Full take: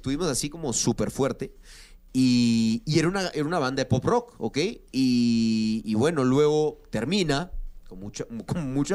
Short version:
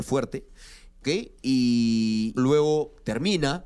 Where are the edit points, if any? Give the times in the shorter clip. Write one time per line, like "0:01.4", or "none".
0:01.0
0:02.4